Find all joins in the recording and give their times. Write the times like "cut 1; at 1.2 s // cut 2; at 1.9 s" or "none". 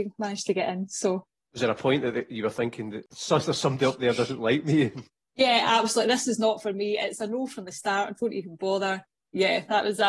none

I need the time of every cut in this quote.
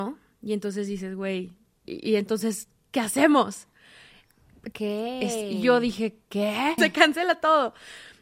cut 1; at 1.8 s // cut 2; at 4.7 s // cut 3; at 6.8 s

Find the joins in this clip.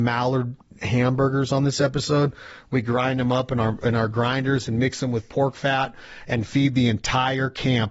none

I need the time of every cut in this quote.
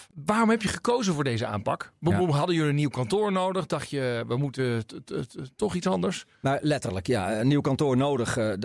none

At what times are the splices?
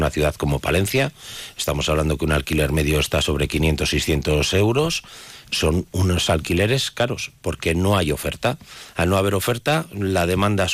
cut 1; at 5.4 s

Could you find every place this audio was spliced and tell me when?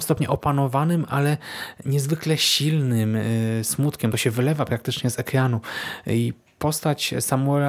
none

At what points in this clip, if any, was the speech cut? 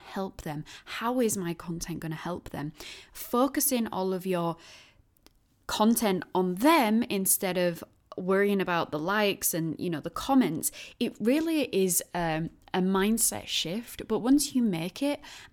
none

